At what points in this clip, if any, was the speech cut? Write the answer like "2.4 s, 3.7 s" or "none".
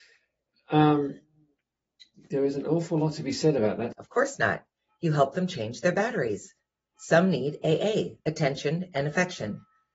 3.9 s